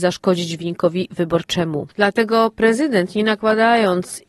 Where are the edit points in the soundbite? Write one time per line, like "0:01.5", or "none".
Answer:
none